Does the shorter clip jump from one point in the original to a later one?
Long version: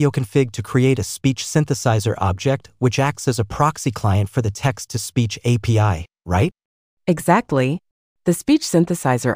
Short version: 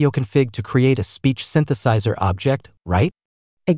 yes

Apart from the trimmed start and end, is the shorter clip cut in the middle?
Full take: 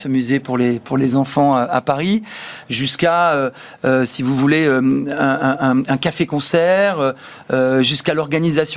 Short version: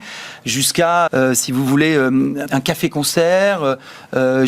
yes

